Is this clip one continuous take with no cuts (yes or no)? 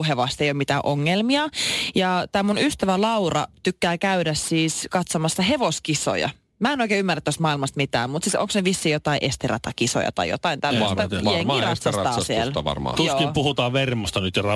yes